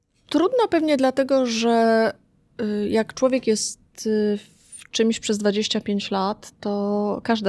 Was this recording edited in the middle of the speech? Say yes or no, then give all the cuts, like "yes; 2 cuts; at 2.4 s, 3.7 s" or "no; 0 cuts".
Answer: no; 0 cuts